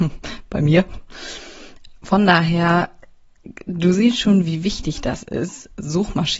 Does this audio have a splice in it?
no; 0 cuts

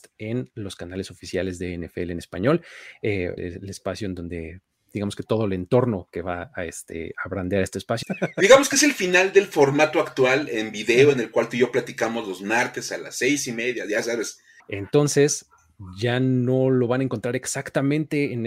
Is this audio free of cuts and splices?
no; 3 cuts; at 3.4 s, 8.0 s, 14.6 s

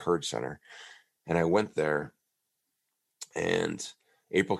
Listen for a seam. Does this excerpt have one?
no; 0 cuts

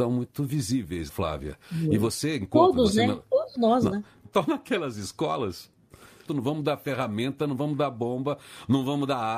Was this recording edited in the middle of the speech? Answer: yes; 3 cuts; at 1.1 s, 4.3 s, 6.3 s

